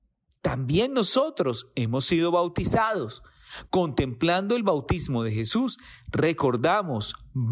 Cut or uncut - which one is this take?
uncut